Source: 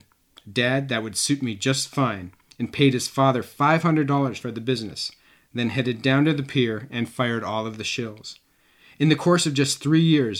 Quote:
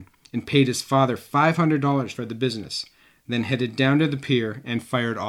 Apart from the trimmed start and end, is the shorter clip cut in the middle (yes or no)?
no